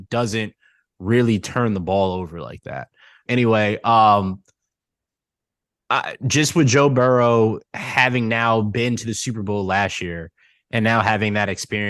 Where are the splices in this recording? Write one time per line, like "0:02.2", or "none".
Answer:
0:03.3